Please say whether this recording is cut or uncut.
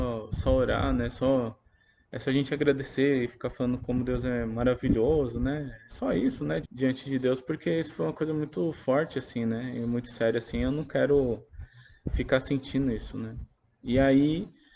cut